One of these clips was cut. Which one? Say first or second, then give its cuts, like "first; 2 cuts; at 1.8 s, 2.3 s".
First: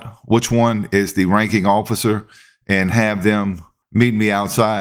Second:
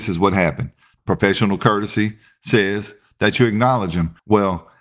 second; 1 cut; at 1.0 s